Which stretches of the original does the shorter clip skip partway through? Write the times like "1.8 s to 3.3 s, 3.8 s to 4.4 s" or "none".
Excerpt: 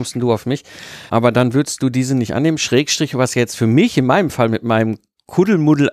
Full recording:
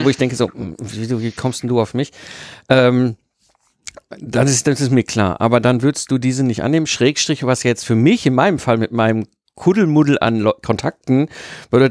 2.6 s to 5.4 s